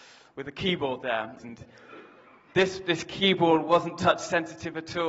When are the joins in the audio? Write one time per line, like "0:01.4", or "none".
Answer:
0:01.4